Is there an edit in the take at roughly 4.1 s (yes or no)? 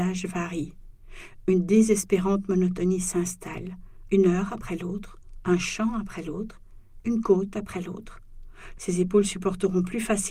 yes